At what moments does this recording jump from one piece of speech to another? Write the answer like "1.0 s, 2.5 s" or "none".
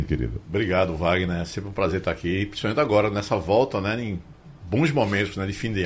none